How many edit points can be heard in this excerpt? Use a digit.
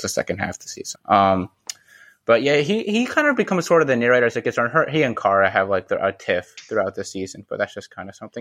1